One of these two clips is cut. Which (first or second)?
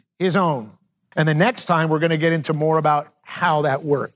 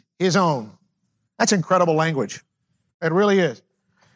first